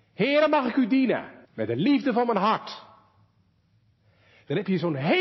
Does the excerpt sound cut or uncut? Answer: cut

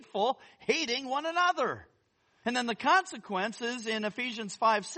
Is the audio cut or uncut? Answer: cut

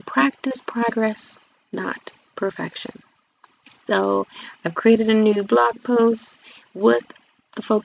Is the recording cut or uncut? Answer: uncut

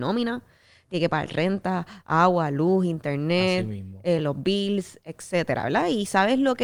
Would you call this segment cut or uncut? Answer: uncut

